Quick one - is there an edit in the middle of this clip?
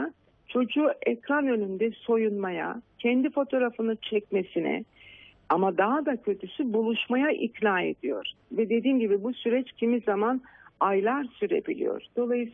no; 0 cuts

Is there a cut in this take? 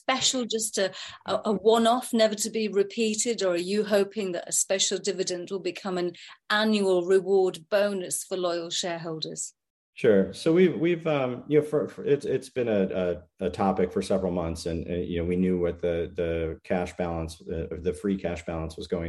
no; 0 cuts

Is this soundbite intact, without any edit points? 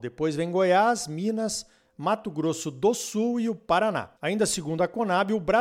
no; 1 cut; at 4.2 s

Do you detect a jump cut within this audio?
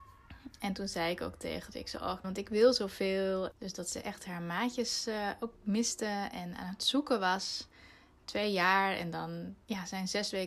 yes; 2 cuts; at 2.2 s, 3.5 s

